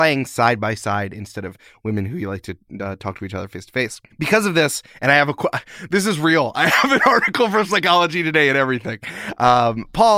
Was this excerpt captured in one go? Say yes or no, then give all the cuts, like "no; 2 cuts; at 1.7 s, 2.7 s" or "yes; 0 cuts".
yes; 0 cuts